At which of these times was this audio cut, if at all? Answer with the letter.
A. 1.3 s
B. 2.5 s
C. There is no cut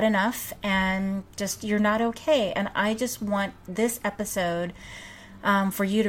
C